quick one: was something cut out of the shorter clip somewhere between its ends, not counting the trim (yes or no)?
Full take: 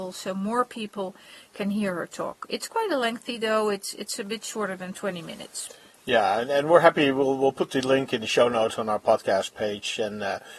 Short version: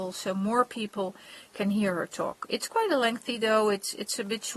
no